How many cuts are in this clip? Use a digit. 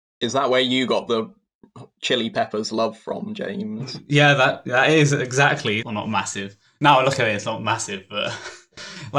1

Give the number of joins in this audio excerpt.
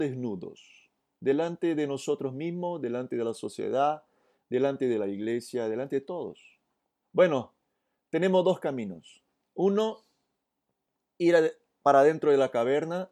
1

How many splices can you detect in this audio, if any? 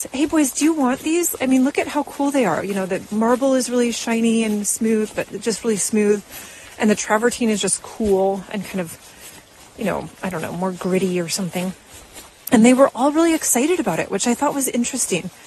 1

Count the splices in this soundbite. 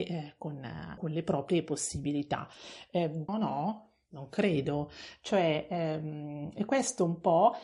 2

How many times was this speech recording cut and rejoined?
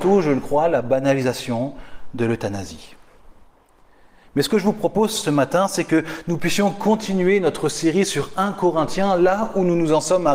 0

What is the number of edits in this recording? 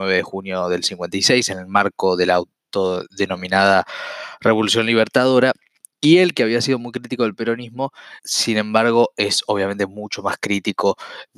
1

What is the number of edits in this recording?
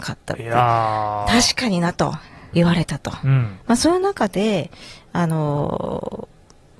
1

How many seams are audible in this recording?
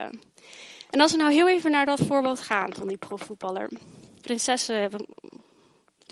1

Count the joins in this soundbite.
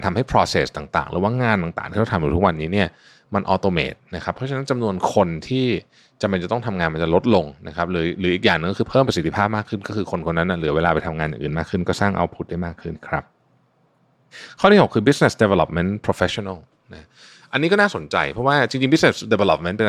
1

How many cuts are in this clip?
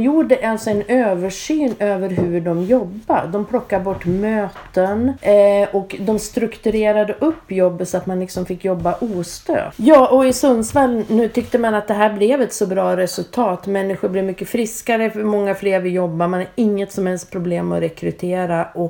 0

